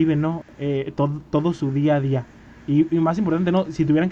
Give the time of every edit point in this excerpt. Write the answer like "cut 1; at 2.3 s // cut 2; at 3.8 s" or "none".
none

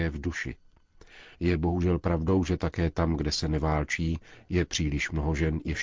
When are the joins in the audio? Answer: cut 1; at 1.3 s

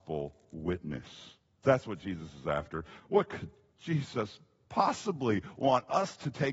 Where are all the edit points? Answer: cut 1; at 1.6 s // cut 2; at 3.0 s

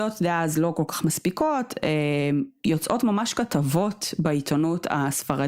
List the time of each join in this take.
none

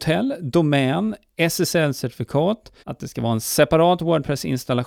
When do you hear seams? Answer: cut 1; at 2.8 s

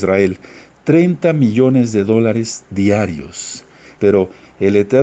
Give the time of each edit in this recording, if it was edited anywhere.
cut 1; at 4.0 s

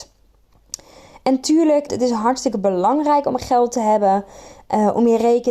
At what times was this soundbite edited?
cut 1; at 1.9 s

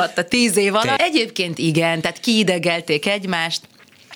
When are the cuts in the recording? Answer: cut 1; at 1.0 s

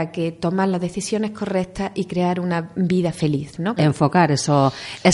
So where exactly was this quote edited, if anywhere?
cut 1; at 3.8 s

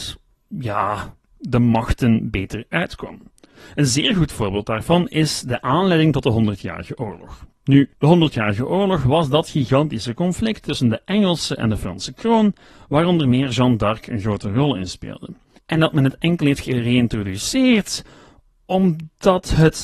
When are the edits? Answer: cut 1; at 7.9 s // cut 2; at 15.6 s

